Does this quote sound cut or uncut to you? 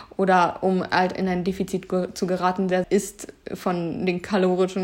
cut